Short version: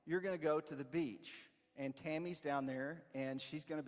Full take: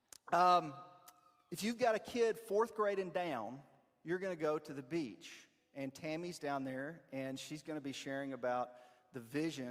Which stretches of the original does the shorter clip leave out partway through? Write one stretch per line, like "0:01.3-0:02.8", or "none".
none